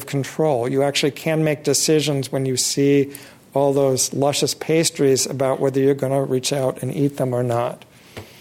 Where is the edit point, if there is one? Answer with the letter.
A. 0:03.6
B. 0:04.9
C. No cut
C